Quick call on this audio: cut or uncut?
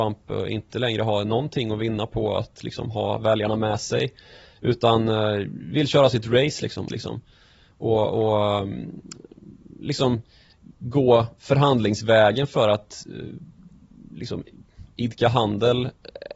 cut